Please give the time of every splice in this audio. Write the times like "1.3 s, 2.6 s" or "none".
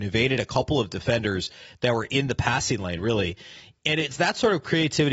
none